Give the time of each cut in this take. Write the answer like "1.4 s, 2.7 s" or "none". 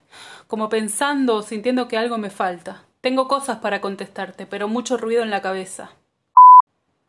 3.0 s